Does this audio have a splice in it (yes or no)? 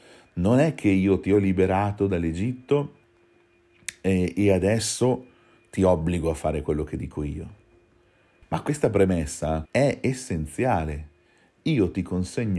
yes